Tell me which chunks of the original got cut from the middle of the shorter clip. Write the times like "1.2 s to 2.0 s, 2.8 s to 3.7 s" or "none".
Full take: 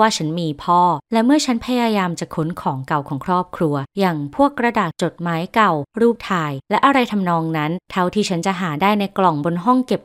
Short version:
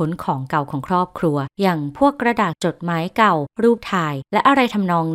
none